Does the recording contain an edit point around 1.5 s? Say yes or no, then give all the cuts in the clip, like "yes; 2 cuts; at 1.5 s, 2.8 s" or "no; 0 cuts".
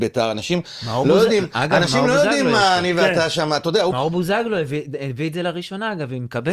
no; 1 cut; at 3.9 s